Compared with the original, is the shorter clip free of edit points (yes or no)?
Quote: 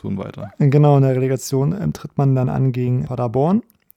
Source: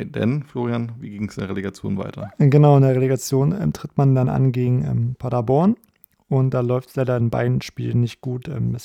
no